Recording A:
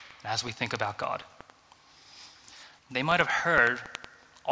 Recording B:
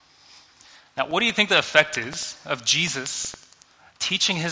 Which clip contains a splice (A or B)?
A